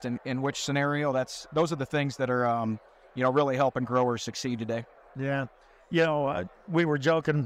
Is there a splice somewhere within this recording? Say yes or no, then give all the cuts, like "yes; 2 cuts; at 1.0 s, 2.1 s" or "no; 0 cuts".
no; 0 cuts